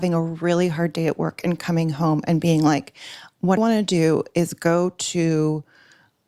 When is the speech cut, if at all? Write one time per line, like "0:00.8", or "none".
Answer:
0:03.6